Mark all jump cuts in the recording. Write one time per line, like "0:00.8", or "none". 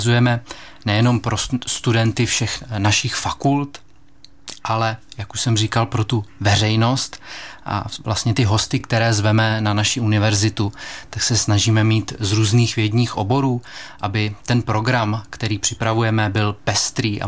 none